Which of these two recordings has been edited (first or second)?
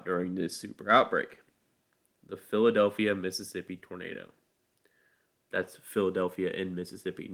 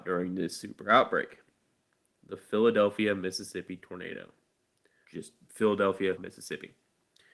second